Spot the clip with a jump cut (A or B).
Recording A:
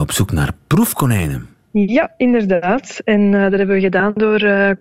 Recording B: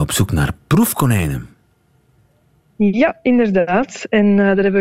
A